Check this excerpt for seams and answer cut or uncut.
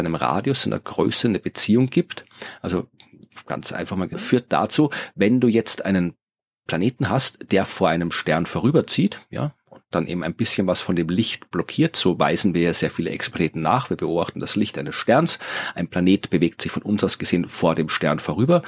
cut